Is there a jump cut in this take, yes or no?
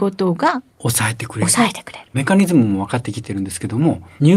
no